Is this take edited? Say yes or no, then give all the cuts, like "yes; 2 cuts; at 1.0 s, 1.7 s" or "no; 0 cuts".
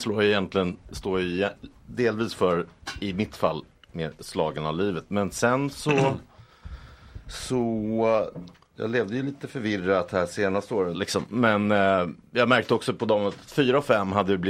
yes; 2 cuts; at 8.7 s, 10.9 s